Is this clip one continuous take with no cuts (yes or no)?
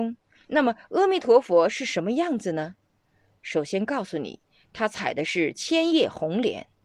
yes